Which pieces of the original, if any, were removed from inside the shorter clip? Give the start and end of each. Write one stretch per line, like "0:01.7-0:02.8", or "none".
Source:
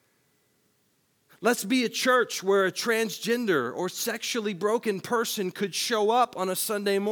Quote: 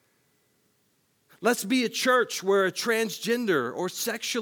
none